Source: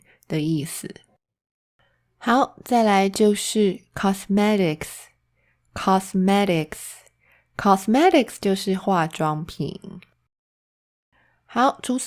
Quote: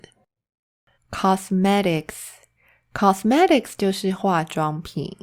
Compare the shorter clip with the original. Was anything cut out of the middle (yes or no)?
yes